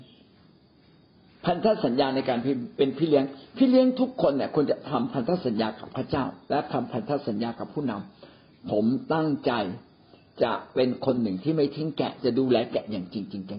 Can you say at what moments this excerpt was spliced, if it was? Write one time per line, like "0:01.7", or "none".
none